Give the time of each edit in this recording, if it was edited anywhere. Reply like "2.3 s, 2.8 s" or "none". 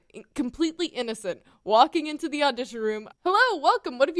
3.1 s